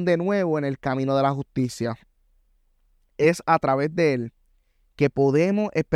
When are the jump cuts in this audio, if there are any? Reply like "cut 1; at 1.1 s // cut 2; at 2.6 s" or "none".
none